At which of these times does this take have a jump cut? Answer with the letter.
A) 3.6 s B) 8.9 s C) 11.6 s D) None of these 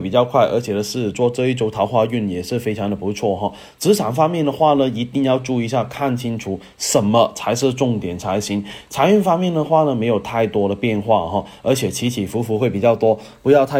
D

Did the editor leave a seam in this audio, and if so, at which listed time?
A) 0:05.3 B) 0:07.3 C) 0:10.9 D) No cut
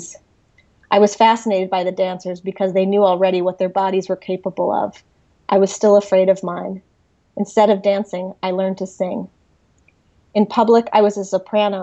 D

